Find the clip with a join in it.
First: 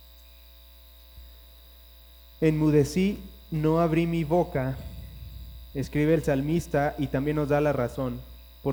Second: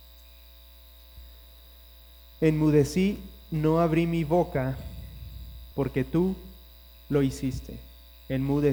second; 1 cut; at 5.7 s

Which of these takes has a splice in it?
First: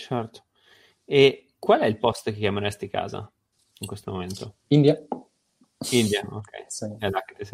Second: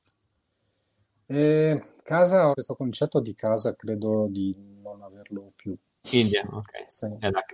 second; 2 cuts; at 2.5 s, 6.0 s

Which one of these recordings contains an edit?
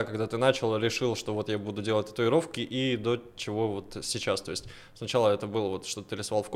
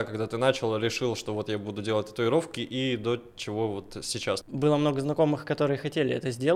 second; 1 cut; at 4.4 s

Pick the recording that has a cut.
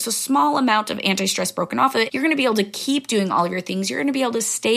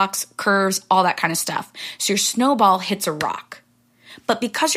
first; 1 cut; at 2.1 s

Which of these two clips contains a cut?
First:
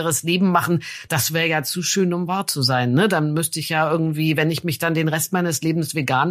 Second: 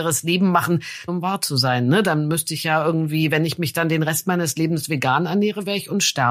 second; 1 cut; at 1.1 s

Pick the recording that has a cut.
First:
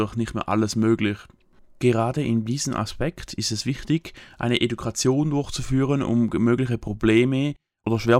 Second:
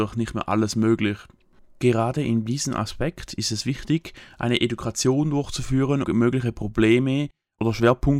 second; 1 cut; at 6.0 s

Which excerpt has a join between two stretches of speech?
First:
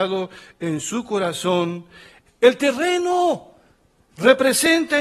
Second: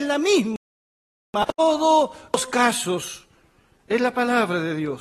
first; 1 cut; at 2.3 s

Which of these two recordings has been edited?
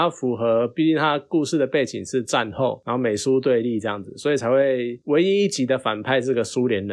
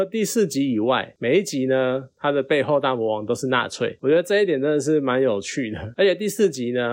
second; 1 cut; at 5.9 s

